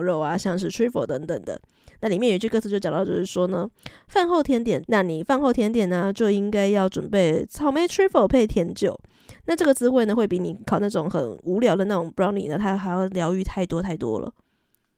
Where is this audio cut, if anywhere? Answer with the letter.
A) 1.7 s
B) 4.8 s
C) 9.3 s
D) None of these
B